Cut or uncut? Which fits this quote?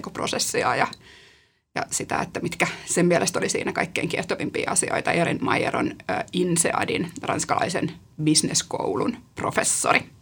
uncut